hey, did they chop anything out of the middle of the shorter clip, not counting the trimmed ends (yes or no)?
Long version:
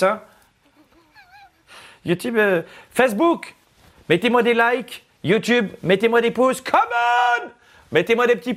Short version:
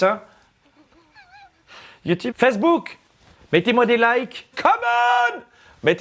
yes